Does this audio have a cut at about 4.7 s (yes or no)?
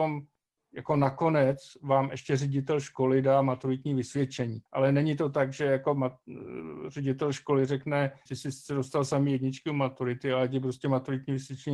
yes